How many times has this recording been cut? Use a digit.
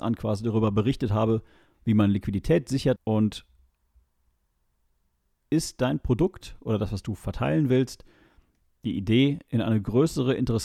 1